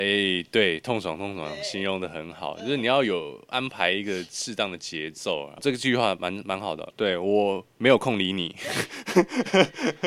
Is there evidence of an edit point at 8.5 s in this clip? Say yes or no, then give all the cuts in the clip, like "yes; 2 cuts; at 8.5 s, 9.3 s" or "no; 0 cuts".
no; 2 cuts; at 5.6 s, 6.9 s